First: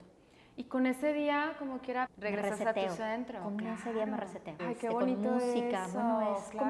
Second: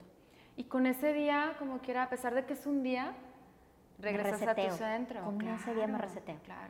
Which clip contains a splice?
first; 2 cuts; at 2.1 s, 4.6 s

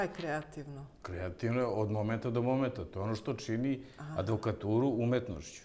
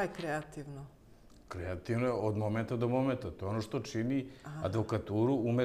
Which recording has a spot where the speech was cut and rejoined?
first; 1 cut; at 0.9 s

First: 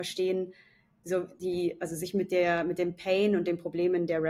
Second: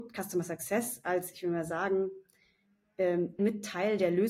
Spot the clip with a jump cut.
second; 1 cut; at 3.4 s

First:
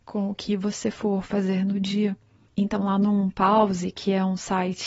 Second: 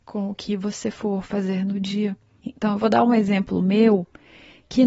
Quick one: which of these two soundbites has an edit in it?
second; 1 cut; at 2.4 s

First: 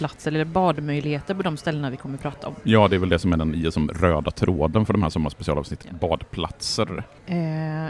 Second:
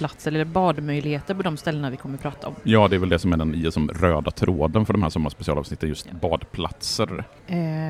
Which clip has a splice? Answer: first; 1 cut; at 5.8 s

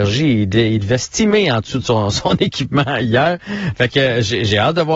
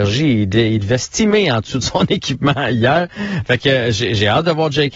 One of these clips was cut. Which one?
second; 1 cut; at 1.8 s

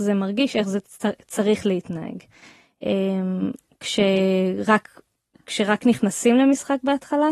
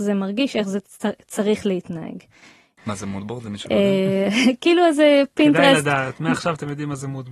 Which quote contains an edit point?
second; 1 cut; at 2.8 s

